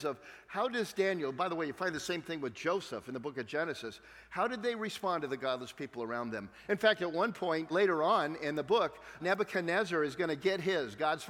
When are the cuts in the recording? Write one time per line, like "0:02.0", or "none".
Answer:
0:06.7
0:07.7
0:09.2